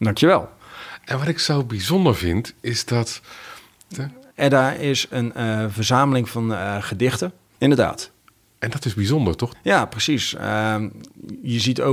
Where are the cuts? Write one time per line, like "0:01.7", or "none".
0:03.9
0:07.6
0:09.5